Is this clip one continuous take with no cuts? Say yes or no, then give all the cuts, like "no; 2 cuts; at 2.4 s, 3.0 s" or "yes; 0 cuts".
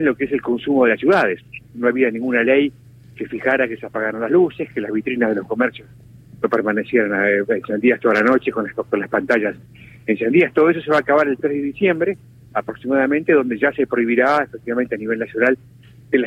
yes; 0 cuts